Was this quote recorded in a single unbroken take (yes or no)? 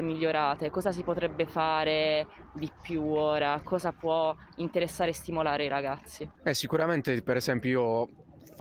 yes